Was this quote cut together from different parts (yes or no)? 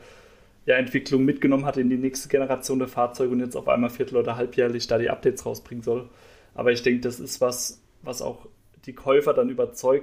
no